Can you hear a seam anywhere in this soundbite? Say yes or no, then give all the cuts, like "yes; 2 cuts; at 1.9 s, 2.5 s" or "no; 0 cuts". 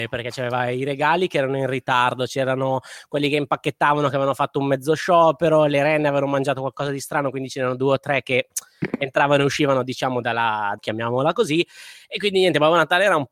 yes; 1 cut; at 10.8 s